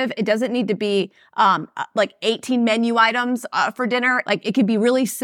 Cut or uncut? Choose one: cut